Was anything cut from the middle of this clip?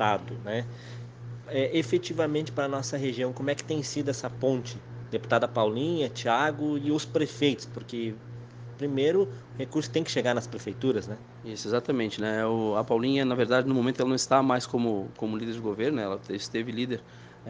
no; 0 cuts

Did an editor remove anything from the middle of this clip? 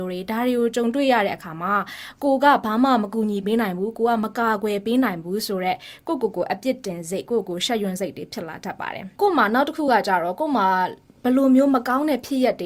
no; 0 cuts

